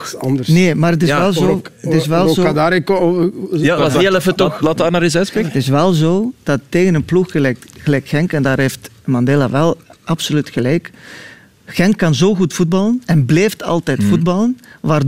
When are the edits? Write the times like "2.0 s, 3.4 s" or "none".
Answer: 3.8 s